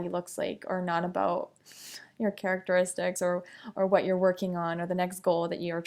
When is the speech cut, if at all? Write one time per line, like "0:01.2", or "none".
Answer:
none

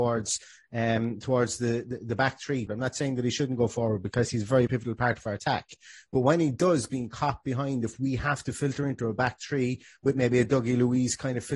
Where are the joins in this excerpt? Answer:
0:02.7
0:04.7

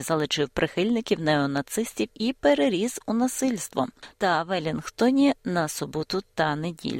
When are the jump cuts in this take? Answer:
0:04.1

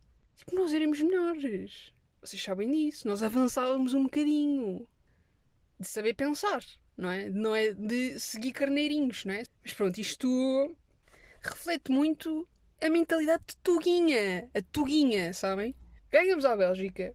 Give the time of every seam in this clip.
0:05.6
0:16.0

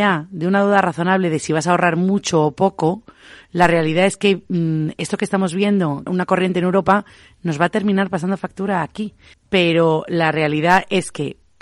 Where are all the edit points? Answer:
0:06.1
0:09.3

